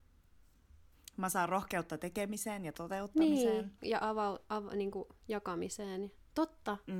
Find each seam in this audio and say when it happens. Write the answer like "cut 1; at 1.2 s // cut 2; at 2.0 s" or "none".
cut 1; at 3.8 s

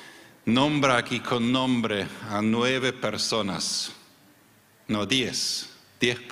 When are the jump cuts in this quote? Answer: none

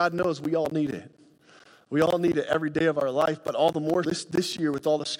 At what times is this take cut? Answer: cut 1; at 4.0 s

